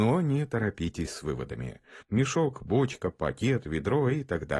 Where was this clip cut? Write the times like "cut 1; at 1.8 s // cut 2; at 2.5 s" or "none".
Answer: cut 1; at 2.0 s